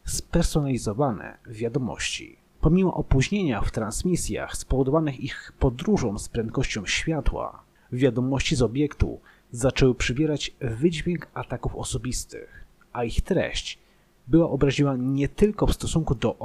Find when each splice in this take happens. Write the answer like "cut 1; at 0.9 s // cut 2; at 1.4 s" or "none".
cut 1; at 2.5 s